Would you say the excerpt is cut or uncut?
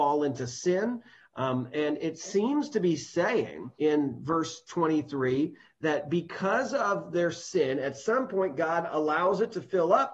cut